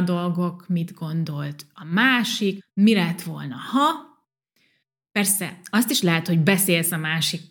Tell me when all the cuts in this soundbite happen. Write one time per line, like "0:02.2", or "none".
0:02.6